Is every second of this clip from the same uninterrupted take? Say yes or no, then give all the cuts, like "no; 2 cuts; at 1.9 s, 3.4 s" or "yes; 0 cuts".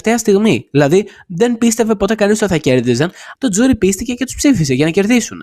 no; 1 cut; at 3.3 s